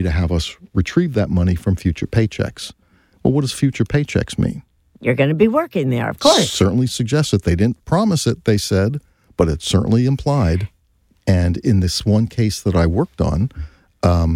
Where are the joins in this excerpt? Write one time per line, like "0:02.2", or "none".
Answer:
0:11.1

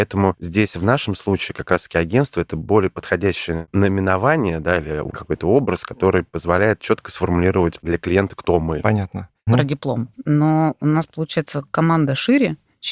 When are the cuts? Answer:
0:09.5

